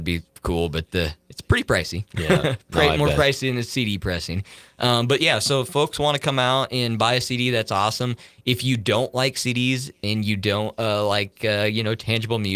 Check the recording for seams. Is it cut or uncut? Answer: uncut